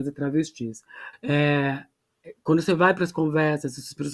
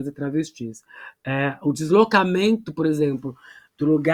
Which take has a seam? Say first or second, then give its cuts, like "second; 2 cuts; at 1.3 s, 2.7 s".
first; 1 cut; at 1.1 s